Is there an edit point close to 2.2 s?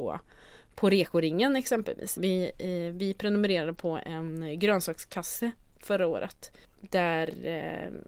yes; 1 cut; at 2.2 s

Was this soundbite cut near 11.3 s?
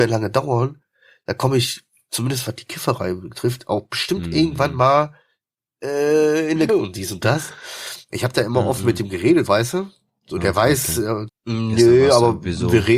yes; 3 cuts; at 6.7 s, 9.5 s, 11.3 s

